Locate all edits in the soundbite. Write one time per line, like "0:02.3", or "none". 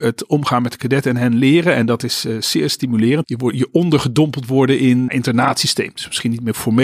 0:03.2
0:05.1